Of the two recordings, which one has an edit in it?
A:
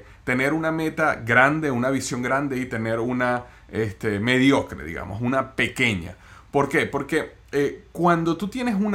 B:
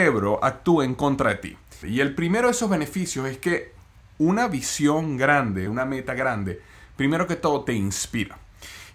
B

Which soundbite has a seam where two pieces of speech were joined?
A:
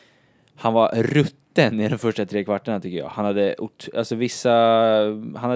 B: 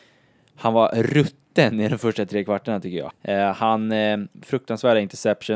B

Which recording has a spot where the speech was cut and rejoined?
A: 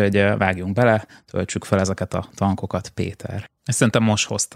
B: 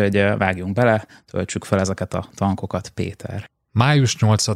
A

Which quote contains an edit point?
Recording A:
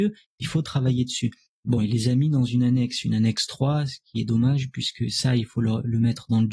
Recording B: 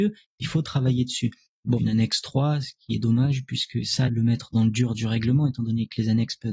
B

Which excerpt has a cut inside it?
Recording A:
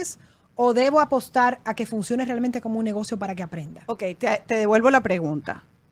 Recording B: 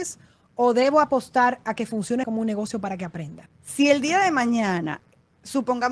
B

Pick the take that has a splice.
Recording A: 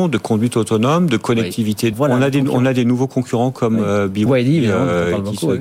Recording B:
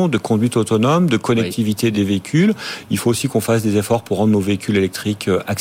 A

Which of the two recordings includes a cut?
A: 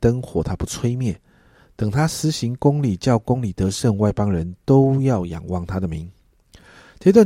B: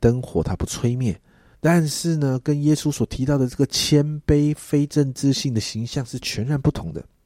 B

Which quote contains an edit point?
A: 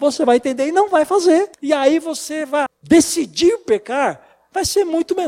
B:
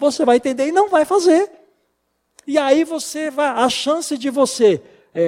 A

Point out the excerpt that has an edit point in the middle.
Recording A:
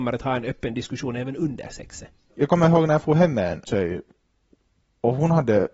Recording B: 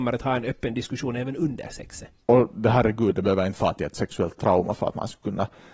B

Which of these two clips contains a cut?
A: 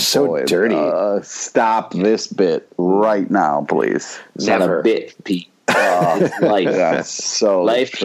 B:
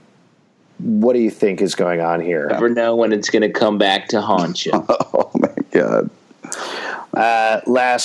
B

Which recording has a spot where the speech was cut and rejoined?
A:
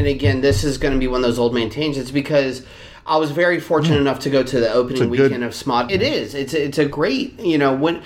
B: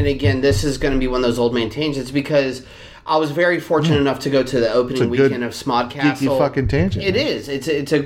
A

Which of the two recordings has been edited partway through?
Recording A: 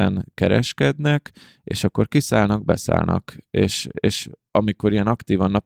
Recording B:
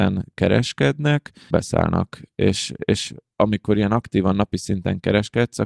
B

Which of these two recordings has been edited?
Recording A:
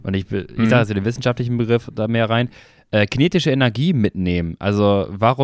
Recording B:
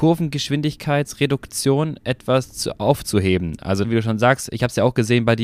B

